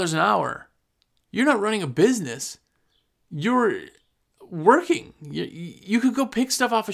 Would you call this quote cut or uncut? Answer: uncut